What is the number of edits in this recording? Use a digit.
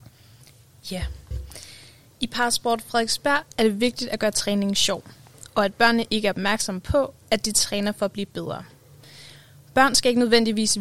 0